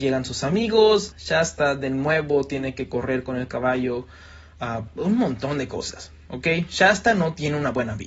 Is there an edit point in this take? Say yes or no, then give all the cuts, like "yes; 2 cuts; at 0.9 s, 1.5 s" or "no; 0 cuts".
yes; 2 cuts; at 1.1 s, 4.9 s